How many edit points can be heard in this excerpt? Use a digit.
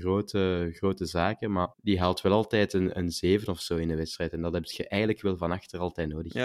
1